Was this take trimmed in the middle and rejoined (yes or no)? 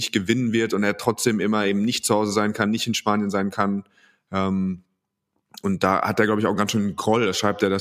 no